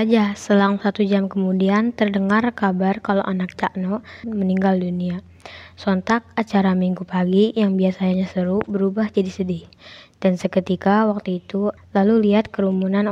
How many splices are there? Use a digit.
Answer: 2